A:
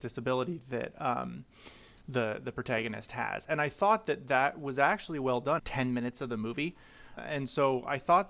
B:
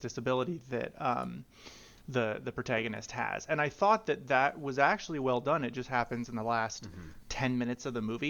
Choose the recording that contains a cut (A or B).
A